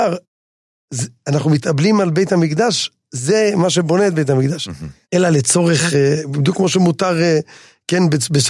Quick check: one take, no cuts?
no; 1 cut; at 5.0 s

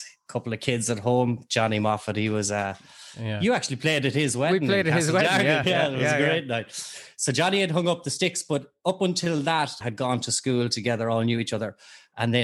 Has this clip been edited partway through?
yes; 2 cuts; at 5.6 s, 9.8 s

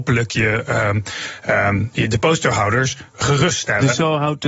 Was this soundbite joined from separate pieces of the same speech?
no; 0 cuts

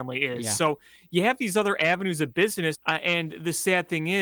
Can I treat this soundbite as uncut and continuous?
no; 1 cut; at 2.7 s

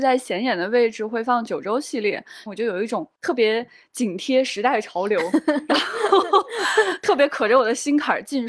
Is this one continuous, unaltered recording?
no; 1 cut; at 2.5 s

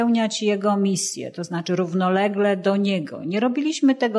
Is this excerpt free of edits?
yes; 0 cuts

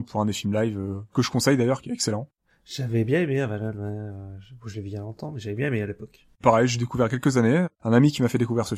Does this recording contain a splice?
no; 0 cuts

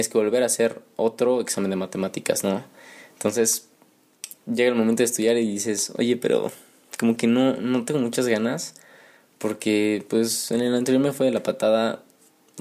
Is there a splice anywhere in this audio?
no; 0 cuts

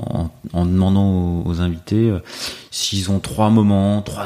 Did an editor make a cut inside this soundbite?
no; 0 cuts

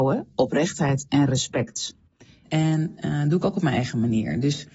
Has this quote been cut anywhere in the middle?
yes; 1 cut; at 2.4 s

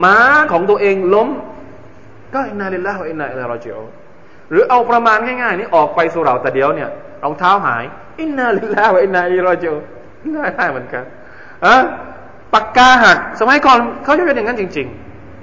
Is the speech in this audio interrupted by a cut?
no; 0 cuts

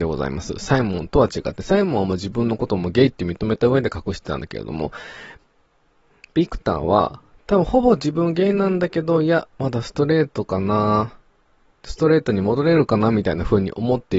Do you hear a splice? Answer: no; 0 cuts

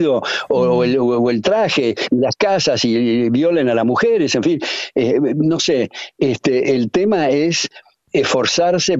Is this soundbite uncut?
no; 1 cut; at 8.0 s

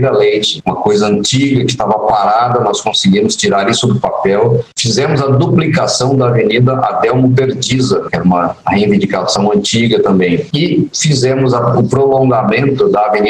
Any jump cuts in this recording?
yes; 1 cut; at 8.1 s

